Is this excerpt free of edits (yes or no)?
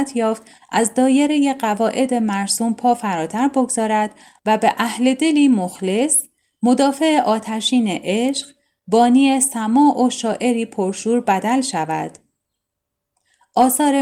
yes